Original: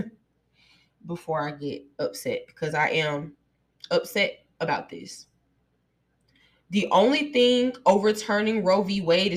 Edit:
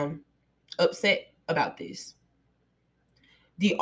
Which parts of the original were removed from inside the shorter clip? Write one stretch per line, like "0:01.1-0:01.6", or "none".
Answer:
none